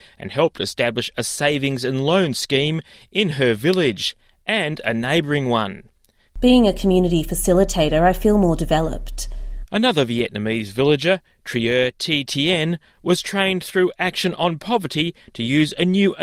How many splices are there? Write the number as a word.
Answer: two